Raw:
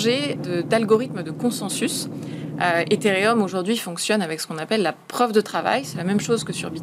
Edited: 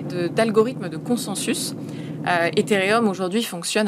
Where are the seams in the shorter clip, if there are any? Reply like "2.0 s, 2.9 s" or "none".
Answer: none